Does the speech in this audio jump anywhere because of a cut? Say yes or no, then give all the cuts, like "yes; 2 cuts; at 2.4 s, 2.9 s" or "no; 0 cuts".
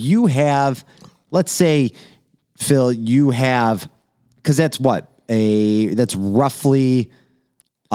no; 0 cuts